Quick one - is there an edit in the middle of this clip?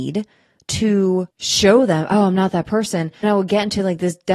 yes; 2 cuts; at 1.3 s, 3.2 s

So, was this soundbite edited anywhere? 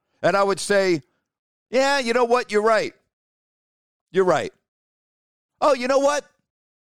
no; 0 cuts

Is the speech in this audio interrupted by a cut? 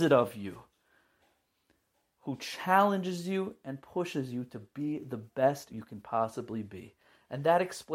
yes; 1 cut; at 5.7 s

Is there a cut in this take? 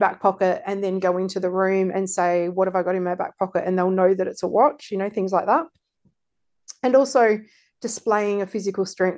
no; 0 cuts

